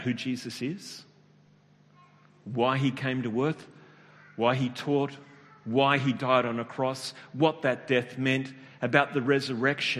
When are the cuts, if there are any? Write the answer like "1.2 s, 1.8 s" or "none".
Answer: none